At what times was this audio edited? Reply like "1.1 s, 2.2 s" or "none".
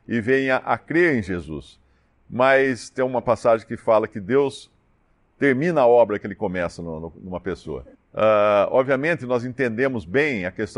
7.9 s